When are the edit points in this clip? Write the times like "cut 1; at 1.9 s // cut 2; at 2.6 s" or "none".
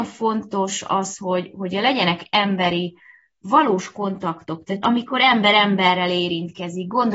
cut 1; at 4.8 s